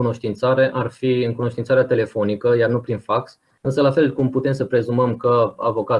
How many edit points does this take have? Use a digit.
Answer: 1